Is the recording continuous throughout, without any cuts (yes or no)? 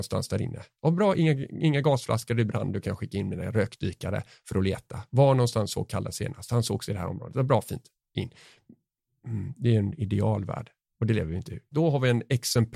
no